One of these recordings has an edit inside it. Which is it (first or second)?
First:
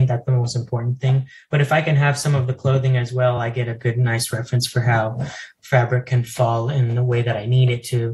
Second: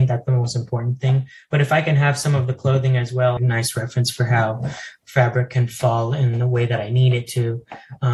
second